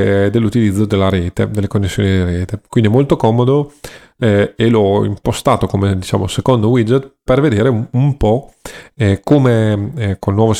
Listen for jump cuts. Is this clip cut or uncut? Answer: uncut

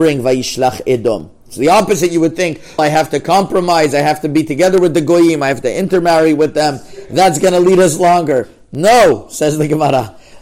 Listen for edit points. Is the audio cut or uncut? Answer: cut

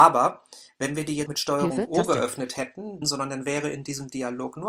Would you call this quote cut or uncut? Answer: cut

